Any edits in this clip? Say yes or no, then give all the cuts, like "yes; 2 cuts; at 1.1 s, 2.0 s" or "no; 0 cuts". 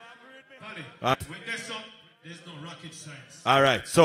yes; 1 cut; at 1.1 s